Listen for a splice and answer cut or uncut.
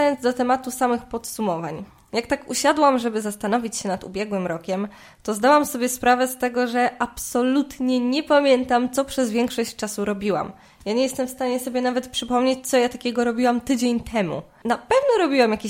uncut